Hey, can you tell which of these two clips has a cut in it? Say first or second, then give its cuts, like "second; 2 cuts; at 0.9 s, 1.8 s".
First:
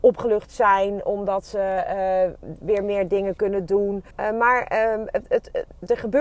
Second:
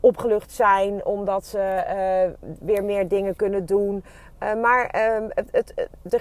first; 1 cut; at 4.1 s